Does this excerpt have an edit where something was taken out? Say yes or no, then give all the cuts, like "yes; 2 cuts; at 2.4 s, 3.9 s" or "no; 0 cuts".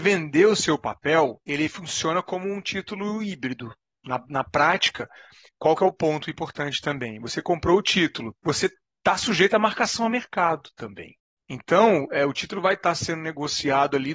no; 0 cuts